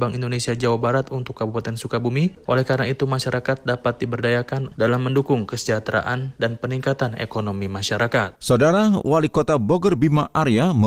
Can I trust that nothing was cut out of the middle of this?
yes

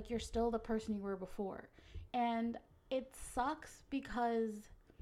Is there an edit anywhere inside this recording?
yes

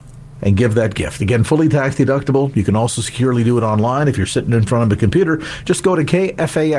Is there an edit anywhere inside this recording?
no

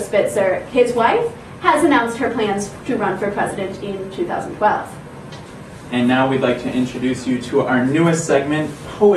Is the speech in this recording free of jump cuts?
yes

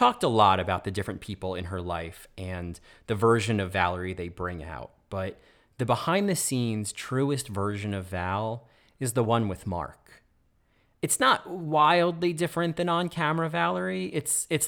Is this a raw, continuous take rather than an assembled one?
yes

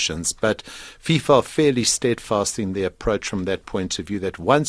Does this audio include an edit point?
no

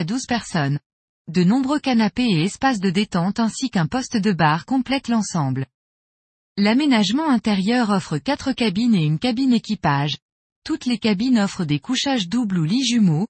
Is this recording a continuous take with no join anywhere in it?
yes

